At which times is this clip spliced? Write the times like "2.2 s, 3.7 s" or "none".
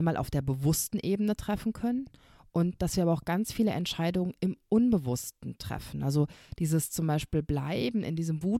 none